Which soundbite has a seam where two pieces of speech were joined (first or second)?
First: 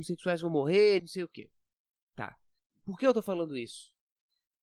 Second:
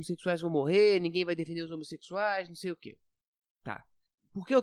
first